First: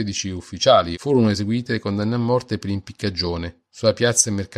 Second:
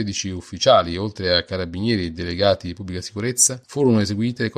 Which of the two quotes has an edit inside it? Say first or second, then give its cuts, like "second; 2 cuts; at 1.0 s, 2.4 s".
first; 1 cut; at 0.9 s